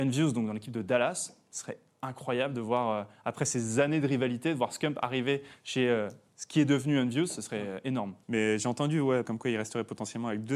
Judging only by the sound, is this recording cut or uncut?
cut